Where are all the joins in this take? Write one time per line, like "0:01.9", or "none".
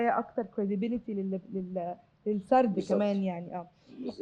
none